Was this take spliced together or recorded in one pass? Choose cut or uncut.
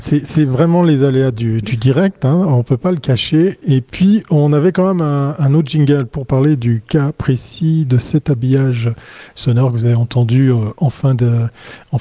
uncut